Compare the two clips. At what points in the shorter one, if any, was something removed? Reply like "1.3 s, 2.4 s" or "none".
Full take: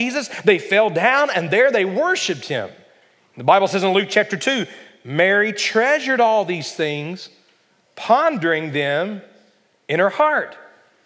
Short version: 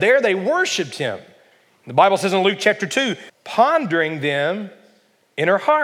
3.3 s